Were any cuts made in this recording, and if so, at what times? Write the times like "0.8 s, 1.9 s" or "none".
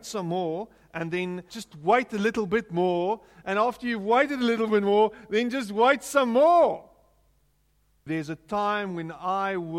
1.5 s, 8.1 s